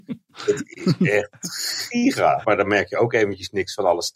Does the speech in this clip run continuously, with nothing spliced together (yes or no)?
no